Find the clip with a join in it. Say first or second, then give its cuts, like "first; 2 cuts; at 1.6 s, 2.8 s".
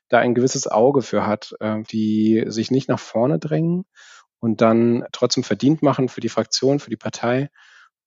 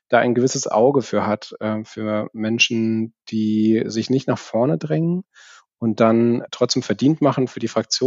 first; 1 cut; at 1.8 s